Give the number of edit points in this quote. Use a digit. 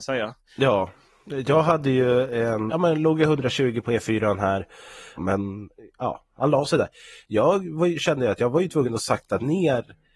2